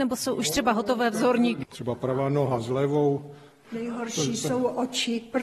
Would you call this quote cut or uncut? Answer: cut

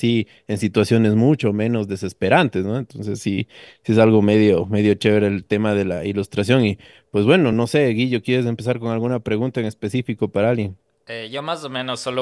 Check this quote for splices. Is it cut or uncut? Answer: uncut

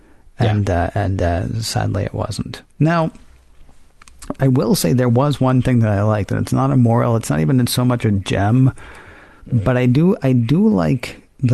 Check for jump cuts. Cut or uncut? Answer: uncut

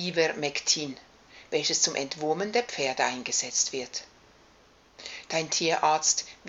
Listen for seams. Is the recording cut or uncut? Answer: uncut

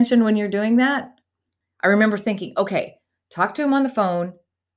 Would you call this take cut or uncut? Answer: cut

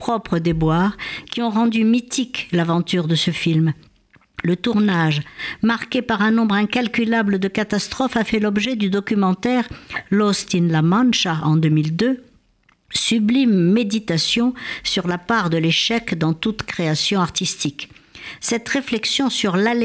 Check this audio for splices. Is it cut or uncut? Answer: uncut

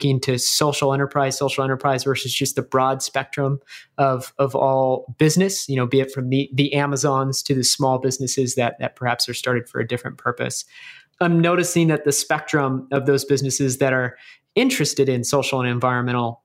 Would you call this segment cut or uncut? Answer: uncut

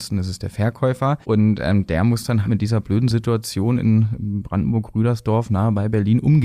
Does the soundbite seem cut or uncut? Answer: cut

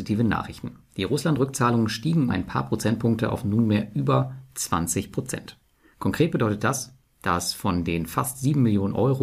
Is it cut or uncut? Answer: cut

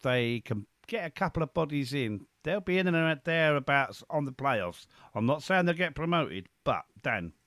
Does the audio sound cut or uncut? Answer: uncut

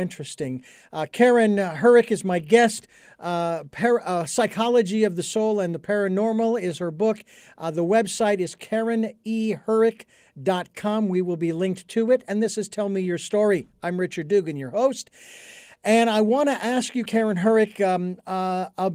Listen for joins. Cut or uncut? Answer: cut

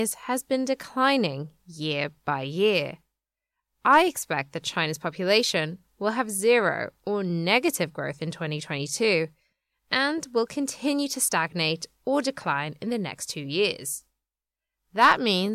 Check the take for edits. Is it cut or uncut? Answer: uncut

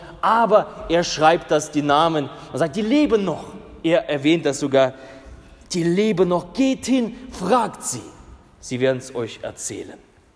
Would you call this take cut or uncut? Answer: uncut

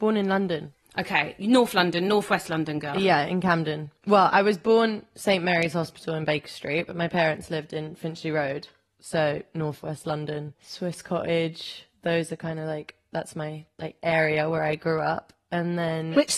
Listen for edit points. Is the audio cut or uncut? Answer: uncut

